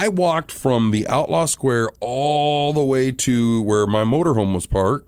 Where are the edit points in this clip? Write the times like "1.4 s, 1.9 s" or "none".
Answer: none